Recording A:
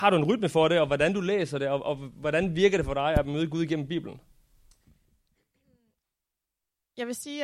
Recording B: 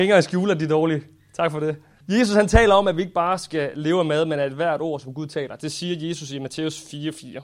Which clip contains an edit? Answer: B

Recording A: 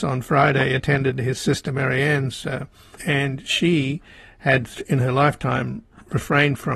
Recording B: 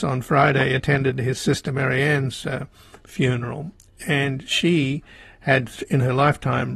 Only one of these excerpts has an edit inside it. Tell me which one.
A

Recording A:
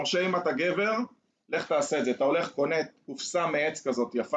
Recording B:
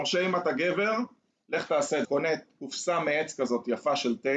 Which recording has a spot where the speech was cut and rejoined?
B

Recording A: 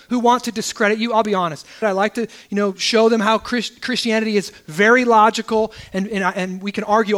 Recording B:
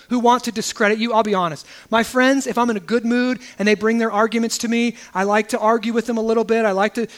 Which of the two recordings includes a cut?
A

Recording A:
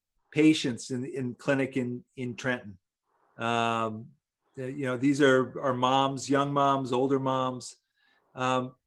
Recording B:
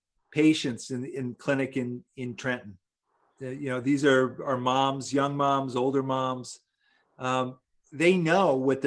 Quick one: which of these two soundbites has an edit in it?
B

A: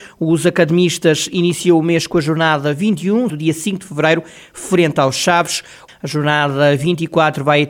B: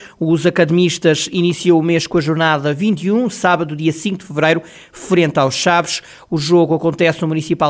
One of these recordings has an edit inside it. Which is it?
A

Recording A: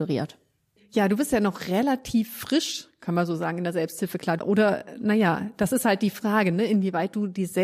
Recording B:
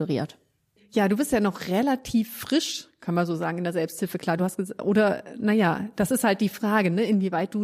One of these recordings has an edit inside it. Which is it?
A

